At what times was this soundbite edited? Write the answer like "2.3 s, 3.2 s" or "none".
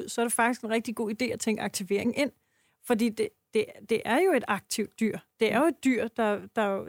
none

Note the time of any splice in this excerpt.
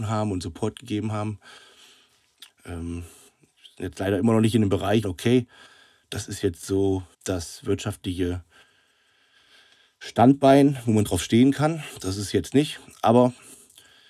2.5 s, 5.0 s, 7.1 s

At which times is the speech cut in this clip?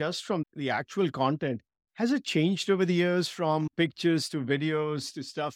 none

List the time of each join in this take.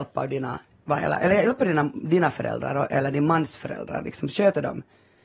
none

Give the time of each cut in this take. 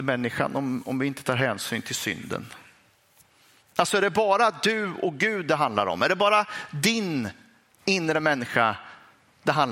3.6 s

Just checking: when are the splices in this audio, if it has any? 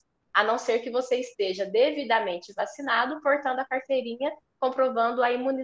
none

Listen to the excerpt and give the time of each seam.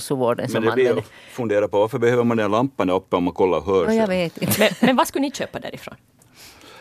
none

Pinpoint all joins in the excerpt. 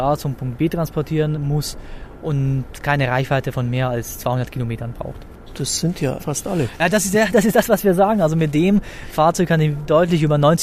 6.2 s

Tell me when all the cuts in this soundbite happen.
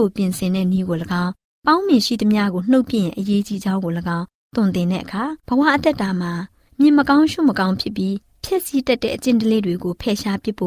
5.4 s

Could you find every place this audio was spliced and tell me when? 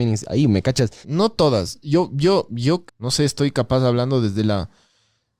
1.0 s, 2.9 s

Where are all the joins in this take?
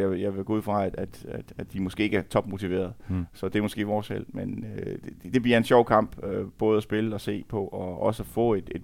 none

